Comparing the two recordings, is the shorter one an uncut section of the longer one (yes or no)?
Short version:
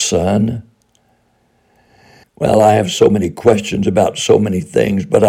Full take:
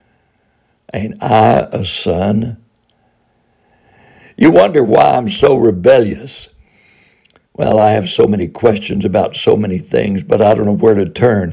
no